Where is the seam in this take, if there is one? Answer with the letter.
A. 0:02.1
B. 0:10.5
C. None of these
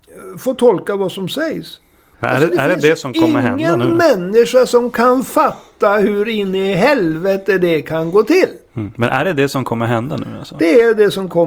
A